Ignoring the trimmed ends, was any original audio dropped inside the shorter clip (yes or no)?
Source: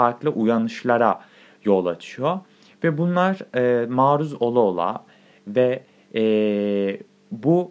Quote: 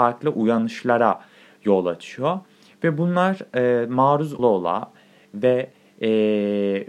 yes